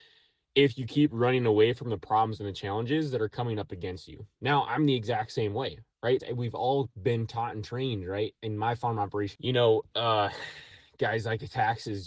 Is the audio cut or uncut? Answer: cut